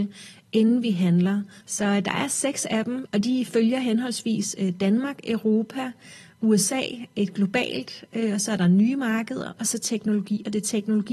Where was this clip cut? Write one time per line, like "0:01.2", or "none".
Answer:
0:01.6
0:03.1